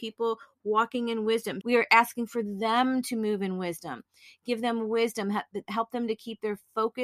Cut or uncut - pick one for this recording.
cut